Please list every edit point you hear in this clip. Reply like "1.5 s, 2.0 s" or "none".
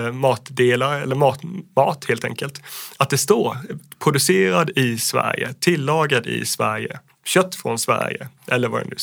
none